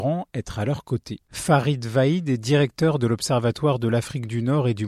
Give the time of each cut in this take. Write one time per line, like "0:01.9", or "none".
0:01.3